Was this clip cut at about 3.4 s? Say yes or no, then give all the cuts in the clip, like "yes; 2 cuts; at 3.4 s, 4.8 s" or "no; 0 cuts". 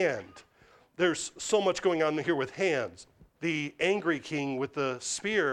yes; 1 cut; at 3.4 s